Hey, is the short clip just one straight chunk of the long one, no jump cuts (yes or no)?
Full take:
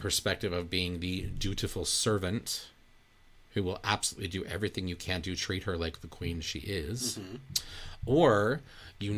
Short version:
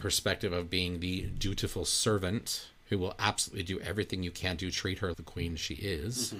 no